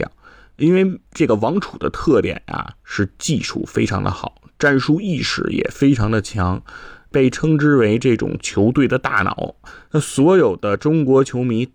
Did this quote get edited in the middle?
yes; 1 cut; at 9.9 s

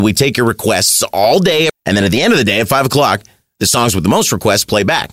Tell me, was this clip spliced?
yes; 1 cut; at 1.7 s

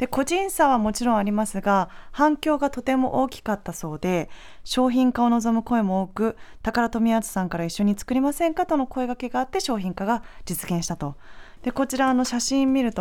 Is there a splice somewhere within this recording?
yes; 1 cut; at 11.6 s

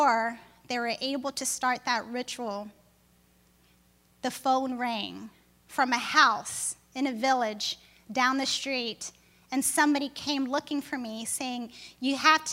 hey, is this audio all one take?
yes; 0 cuts

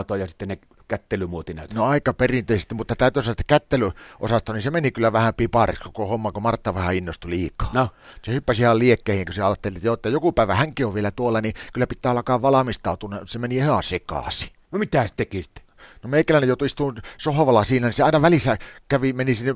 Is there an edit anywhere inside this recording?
no; 0 cuts

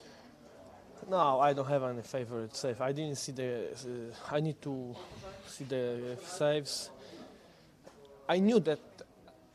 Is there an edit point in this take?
no; 0 cuts

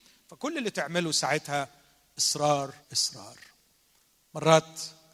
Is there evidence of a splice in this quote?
yes; 1 cut; at 2.8 s

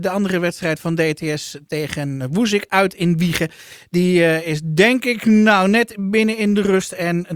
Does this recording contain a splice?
no; 0 cuts

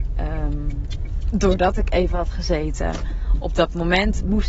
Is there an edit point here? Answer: no; 0 cuts

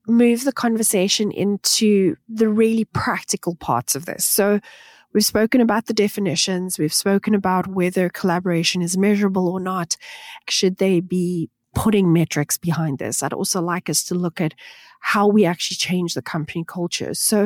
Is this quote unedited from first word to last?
no; 1 cut; at 10.4 s

